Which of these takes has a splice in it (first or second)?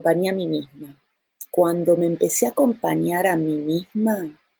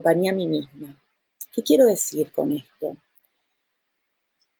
second